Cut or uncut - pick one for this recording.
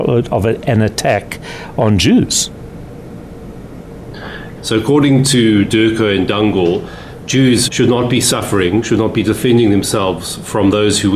cut